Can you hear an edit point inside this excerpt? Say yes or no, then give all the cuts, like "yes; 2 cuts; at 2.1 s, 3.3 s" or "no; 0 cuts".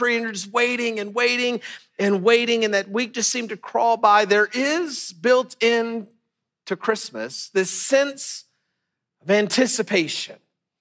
no; 0 cuts